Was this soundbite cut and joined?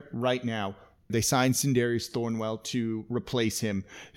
yes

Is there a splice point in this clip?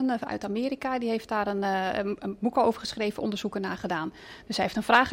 no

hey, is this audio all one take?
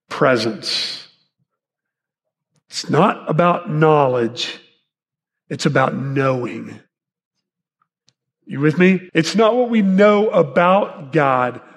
no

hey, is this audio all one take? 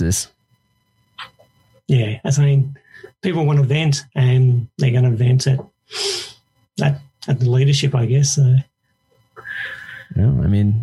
yes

